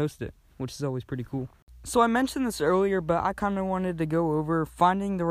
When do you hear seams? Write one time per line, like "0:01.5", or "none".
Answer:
none